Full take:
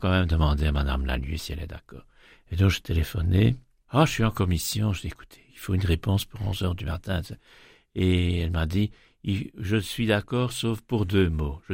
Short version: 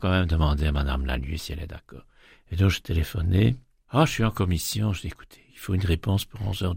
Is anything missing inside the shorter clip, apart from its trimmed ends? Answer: no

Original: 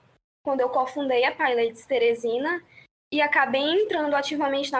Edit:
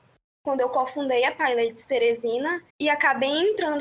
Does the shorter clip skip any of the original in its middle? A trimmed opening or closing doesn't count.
yes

